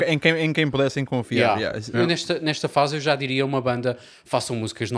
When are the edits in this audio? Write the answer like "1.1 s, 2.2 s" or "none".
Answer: 1.9 s